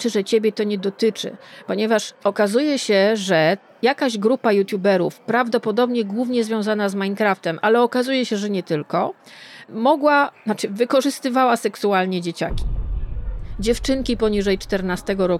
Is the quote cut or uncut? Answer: uncut